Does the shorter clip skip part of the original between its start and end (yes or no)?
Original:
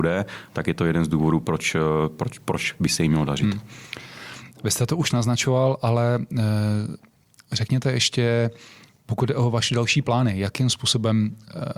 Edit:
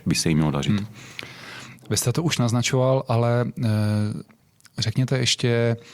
no